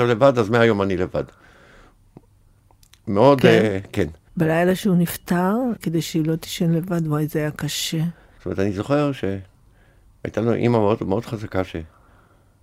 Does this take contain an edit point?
yes; 3 cuts; at 4.3 s, 5.8 s, 8.4 s

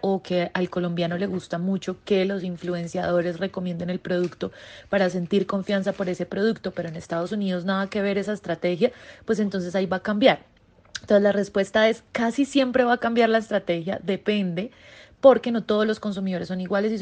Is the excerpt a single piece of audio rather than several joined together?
yes; 0 cuts

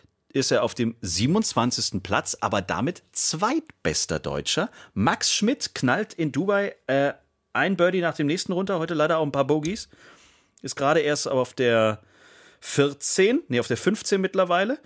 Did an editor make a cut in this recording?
no; 0 cuts

